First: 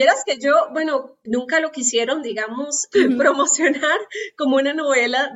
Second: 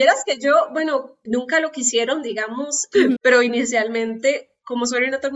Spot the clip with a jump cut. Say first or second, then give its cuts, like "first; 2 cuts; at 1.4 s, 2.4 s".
second; 1 cut; at 3.2 s